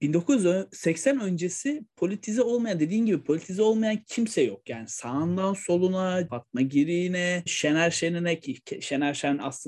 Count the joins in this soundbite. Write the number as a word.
two